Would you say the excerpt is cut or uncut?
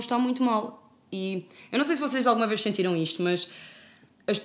uncut